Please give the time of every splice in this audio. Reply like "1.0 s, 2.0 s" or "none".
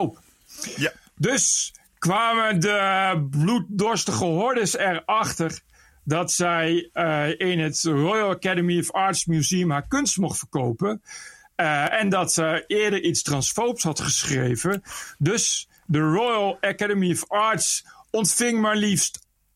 none

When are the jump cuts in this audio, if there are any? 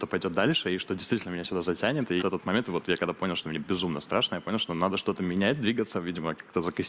2.2 s

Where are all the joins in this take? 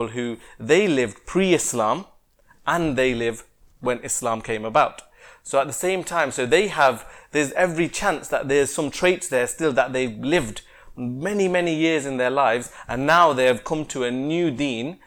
none

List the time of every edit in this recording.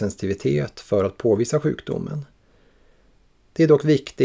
none

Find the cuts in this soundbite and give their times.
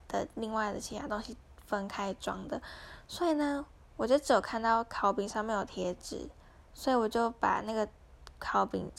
5.7 s

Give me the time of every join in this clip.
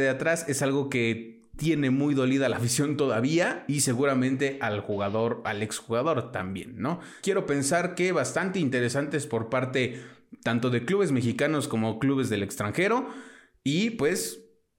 7.2 s

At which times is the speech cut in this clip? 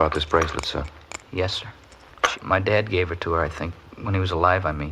1.3 s, 2.3 s

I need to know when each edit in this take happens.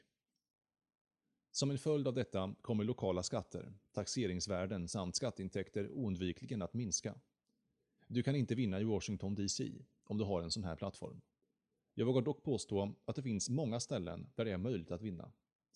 8.0 s

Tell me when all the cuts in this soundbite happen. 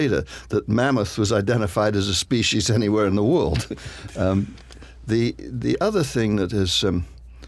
none

